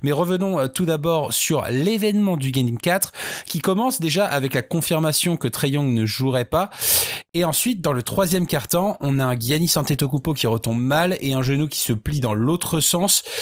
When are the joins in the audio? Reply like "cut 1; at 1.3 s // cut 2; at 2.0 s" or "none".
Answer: none